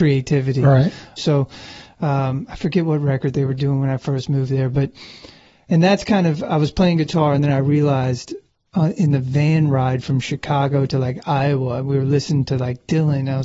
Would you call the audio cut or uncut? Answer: cut